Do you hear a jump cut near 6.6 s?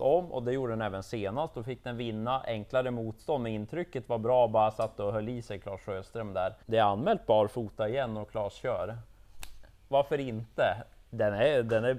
yes; 1 cut; at 6.6 s

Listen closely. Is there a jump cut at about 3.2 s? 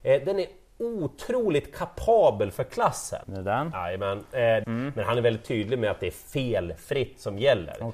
yes; 2 cuts; at 3.2 s, 4.6 s

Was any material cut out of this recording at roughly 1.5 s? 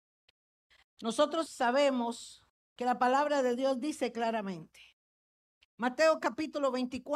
yes; 1 cut; at 1.5 s

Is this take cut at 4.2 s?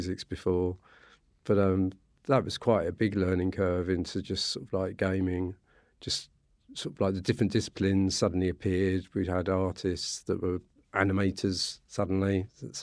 no; 0 cuts

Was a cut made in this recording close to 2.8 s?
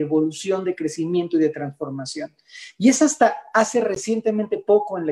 no; 0 cuts

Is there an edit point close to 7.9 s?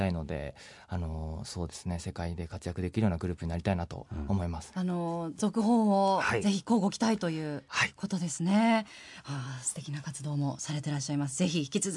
no; 1 cut; at 4.7 s

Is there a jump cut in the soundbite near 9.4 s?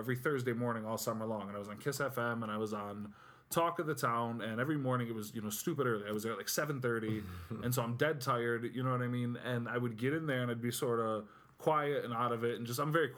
no; 0 cuts

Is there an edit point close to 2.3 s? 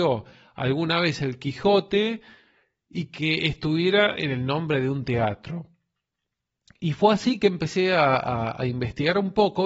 no; 0 cuts

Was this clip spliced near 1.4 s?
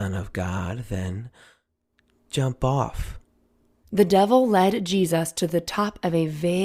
no; 1 cut; at 3.8 s

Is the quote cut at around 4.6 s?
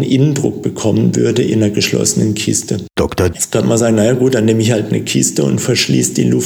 no; 1 cut; at 3.3 s

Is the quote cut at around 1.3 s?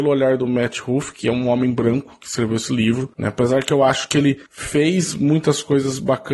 no; 1 cut; at 4.5 s

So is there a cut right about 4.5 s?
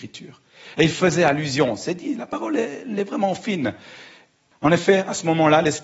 yes; 1 cut; at 4.5 s

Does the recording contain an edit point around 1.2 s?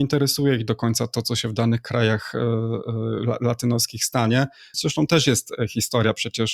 no; 1 cut; at 4.7 s

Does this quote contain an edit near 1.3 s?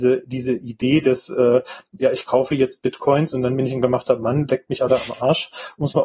no; 0 cuts

